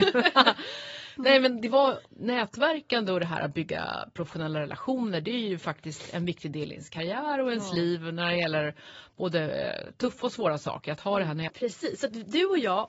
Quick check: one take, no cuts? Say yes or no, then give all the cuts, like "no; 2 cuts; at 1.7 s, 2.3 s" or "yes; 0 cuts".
no; 2 cuts; at 2.0 s, 11.5 s